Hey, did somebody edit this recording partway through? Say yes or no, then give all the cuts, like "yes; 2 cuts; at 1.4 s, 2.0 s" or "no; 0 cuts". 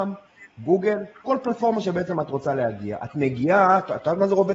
yes; 1 cut; at 1.2 s